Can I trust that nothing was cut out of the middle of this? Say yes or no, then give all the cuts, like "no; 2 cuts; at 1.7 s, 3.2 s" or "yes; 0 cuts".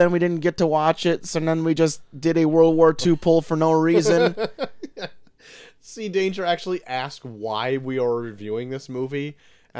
yes; 0 cuts